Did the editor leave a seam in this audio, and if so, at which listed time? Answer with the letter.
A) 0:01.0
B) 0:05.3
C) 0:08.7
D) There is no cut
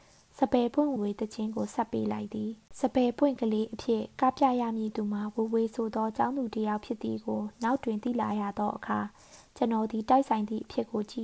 A